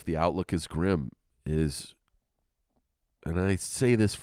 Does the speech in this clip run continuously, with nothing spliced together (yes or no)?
yes